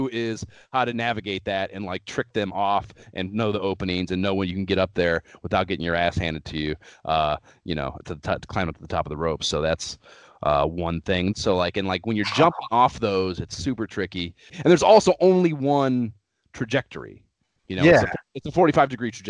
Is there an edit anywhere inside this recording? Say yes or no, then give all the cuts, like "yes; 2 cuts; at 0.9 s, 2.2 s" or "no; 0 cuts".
yes; 1 cut; at 11.3 s